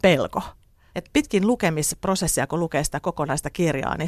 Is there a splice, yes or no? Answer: yes